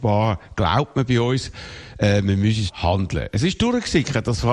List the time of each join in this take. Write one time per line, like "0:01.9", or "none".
0:02.7